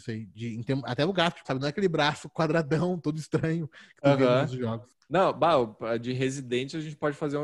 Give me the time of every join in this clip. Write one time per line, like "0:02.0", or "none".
0:01.4